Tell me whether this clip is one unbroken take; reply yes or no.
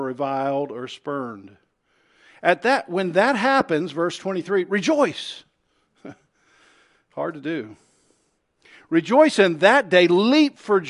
yes